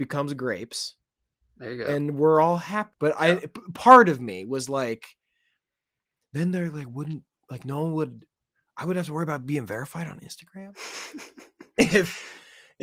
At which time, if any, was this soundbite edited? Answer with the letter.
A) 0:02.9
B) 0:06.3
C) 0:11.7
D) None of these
A